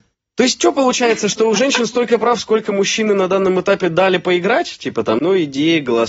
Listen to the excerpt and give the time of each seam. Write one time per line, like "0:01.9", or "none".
0:05.2